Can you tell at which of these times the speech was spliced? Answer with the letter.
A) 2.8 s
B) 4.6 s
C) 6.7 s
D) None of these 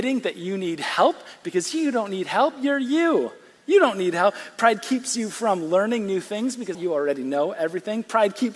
C